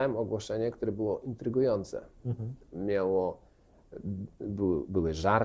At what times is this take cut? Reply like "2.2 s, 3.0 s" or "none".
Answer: none